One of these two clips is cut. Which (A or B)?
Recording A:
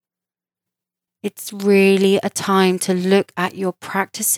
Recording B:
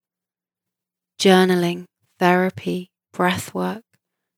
A